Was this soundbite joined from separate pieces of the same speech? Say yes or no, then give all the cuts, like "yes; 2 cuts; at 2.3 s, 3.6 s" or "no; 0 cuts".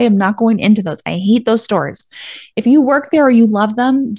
no; 0 cuts